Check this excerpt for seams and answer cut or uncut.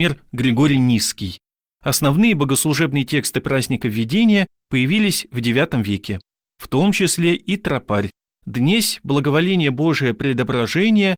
uncut